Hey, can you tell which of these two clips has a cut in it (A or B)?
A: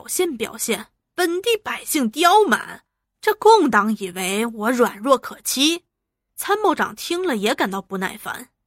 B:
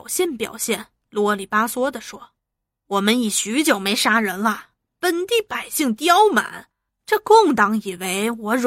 A